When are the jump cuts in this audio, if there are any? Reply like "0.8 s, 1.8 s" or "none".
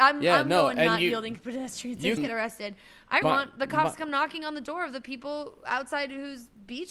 2.2 s, 3.2 s